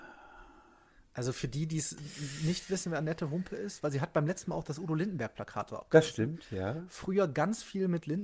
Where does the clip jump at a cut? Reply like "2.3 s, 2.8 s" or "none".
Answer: none